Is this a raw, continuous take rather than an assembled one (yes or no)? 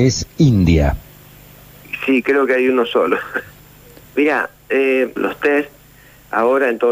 no